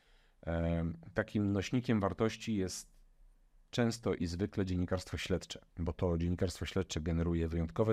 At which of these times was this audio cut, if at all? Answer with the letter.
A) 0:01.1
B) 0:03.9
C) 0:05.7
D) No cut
C